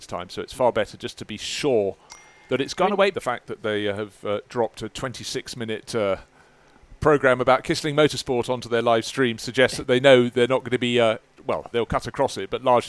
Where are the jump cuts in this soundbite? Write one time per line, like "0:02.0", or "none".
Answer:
0:03.1
0:11.7

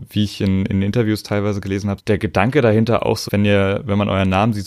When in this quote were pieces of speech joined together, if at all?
0:02.0
0:03.3

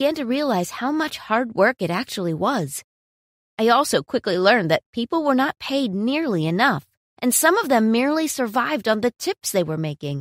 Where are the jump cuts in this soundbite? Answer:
none

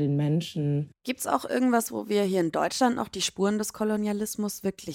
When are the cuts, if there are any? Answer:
none

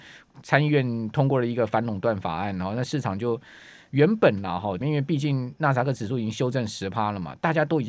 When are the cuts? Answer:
0:04.8

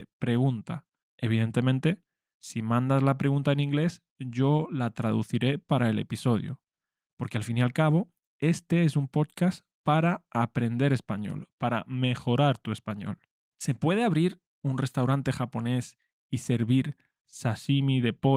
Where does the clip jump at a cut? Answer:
0:01.0
0:13.4

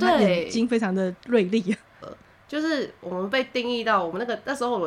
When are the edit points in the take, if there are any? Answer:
0:02.0

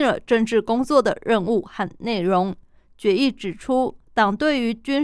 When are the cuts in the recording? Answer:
0:04.0

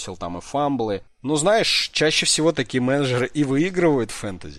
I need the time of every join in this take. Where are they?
0:01.1

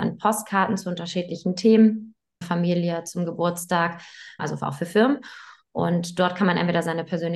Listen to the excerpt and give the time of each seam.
0:02.4
0:04.4

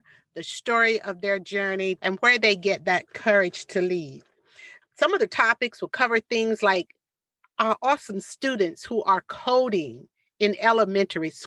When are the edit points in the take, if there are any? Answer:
0:02.0

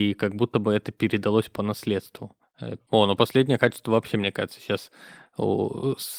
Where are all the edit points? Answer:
0:02.8

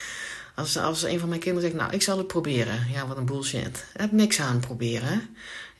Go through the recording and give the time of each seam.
none

